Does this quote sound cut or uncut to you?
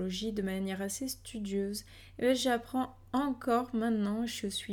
uncut